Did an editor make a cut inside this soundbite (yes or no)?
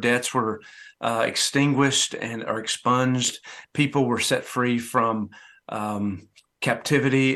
yes